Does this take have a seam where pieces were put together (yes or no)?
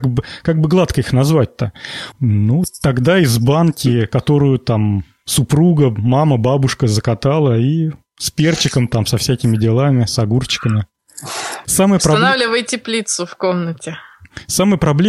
yes